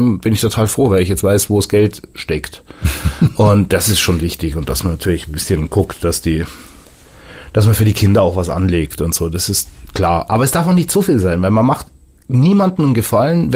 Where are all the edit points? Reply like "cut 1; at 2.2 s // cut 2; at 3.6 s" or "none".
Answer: none